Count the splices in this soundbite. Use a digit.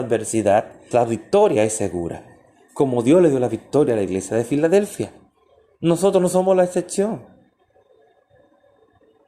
1